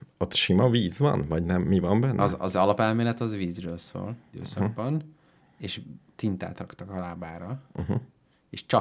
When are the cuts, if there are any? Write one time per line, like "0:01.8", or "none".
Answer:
0:04.3